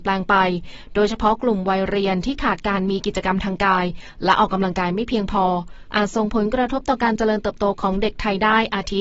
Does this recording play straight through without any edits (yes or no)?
yes